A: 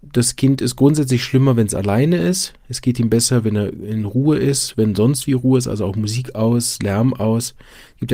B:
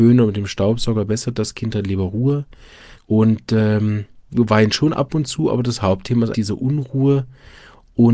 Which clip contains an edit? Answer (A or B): B